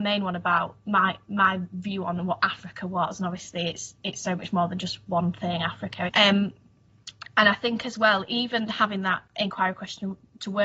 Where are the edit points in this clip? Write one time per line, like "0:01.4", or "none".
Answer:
0:06.1

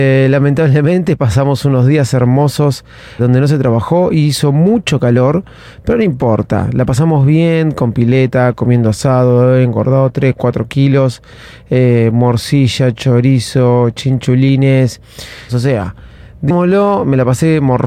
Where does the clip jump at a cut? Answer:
0:03.2
0:15.5

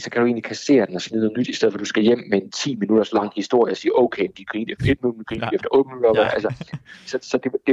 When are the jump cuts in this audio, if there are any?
none

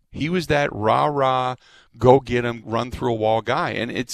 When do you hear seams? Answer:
0:02.6

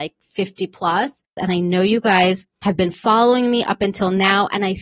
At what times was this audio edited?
0:01.4

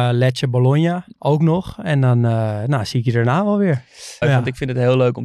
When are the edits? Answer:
0:01.1
0:04.2

